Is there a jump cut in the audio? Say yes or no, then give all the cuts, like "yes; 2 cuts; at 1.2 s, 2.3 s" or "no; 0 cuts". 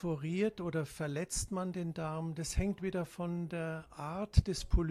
no; 0 cuts